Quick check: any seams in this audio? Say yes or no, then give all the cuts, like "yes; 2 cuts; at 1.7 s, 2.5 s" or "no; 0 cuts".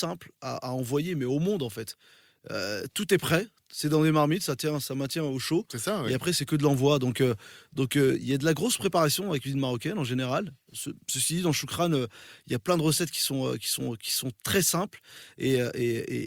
no; 0 cuts